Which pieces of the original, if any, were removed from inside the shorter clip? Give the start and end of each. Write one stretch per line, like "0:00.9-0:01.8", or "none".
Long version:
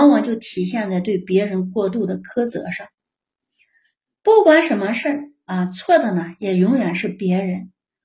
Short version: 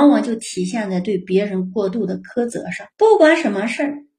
0:02.9-0:04.2